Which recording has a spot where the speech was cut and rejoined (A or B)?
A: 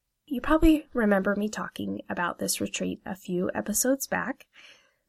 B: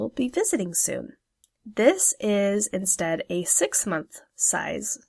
B